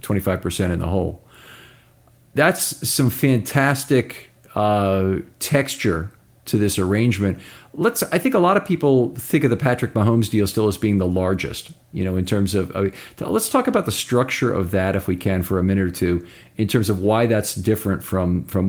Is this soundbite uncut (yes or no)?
yes